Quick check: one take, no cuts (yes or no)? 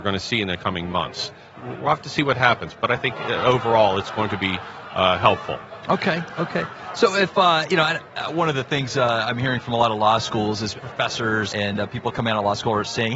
yes